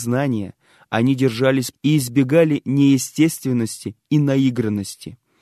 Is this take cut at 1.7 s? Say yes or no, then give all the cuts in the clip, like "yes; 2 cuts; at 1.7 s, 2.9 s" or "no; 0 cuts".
yes; 1 cut; at 1.7 s